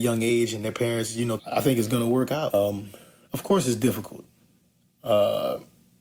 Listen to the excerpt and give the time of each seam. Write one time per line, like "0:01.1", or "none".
0:01.4
0:02.5